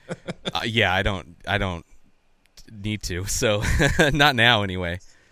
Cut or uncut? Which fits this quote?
uncut